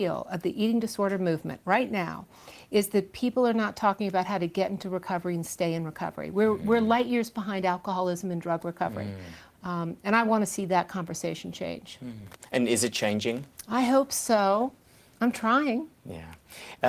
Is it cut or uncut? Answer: uncut